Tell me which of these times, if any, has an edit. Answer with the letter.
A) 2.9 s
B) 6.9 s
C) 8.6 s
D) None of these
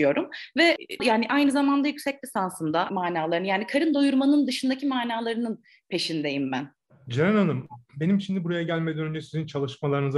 A